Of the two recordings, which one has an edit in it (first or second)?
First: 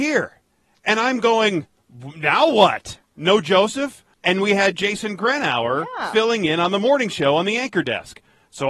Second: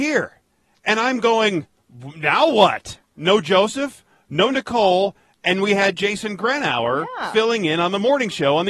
first